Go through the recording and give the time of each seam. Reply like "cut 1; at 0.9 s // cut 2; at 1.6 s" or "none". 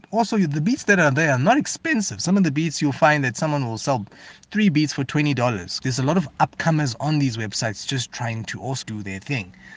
cut 1; at 5.8 s // cut 2; at 8.8 s